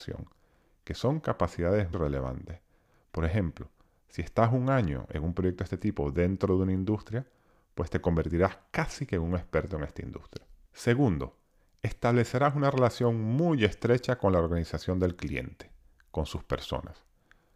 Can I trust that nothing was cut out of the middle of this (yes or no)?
no